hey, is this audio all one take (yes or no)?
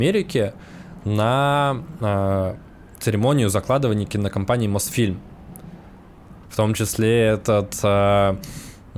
no